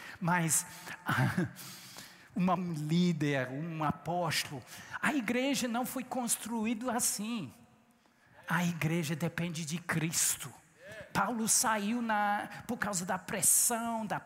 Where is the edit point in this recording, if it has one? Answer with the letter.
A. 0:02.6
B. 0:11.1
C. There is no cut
A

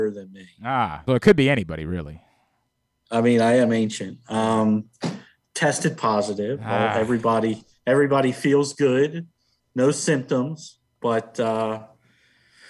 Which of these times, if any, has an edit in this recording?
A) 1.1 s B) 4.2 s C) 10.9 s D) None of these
A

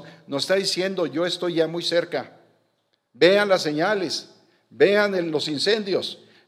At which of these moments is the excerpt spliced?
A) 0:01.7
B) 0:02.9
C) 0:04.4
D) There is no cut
D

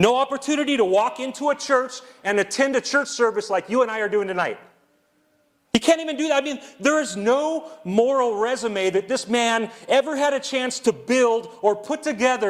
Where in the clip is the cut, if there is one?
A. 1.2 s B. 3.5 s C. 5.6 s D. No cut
C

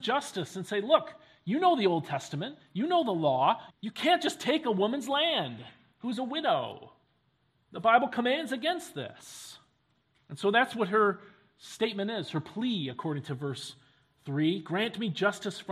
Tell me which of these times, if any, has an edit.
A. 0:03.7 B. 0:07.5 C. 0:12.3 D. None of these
A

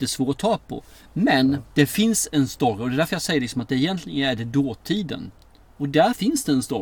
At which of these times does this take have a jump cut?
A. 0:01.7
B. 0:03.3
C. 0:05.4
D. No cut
D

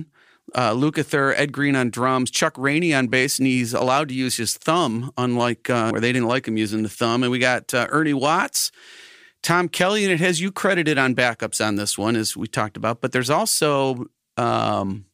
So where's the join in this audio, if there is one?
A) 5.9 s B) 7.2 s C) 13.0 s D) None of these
A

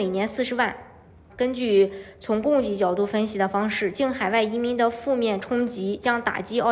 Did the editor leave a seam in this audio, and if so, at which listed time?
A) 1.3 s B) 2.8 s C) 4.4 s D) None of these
A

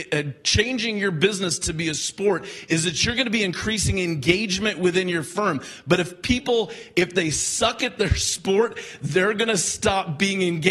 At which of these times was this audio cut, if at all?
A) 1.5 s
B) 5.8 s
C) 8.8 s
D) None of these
D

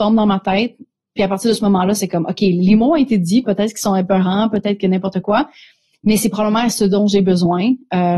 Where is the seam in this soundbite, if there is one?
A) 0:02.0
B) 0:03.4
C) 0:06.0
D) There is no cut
B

